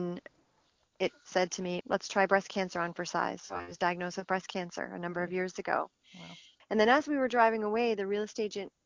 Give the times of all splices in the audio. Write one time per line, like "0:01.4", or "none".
0:01.8
0:06.6